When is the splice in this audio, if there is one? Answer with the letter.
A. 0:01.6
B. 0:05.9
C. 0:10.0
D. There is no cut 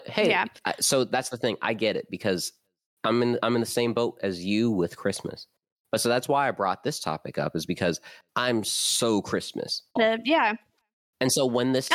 C